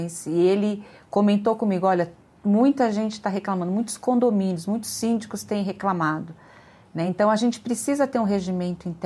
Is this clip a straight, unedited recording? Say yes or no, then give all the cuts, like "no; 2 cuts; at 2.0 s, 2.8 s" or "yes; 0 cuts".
yes; 0 cuts